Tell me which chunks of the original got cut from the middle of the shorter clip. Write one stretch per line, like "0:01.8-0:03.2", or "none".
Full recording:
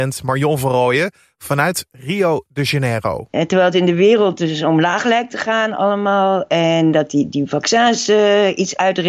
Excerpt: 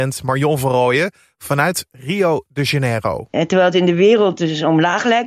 none